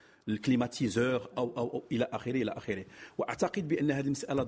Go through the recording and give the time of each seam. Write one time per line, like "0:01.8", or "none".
0:01.3